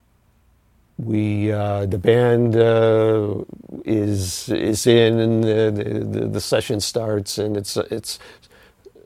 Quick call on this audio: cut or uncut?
uncut